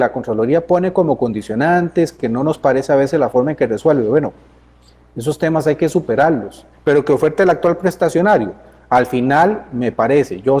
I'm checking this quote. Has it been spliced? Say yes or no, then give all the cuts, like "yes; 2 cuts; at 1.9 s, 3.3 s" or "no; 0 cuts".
yes; 1 cut; at 6.7 s